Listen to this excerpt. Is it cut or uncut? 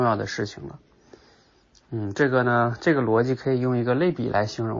uncut